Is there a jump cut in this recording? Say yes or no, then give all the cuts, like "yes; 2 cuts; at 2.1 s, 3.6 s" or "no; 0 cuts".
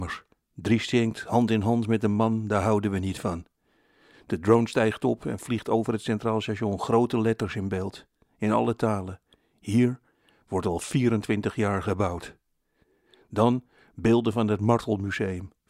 no; 0 cuts